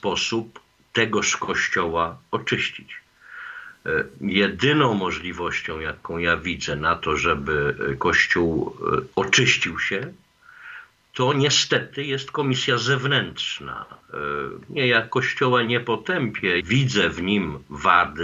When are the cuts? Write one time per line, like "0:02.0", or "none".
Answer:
0:09.1
0:14.7
0:16.6